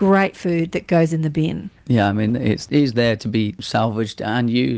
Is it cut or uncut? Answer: cut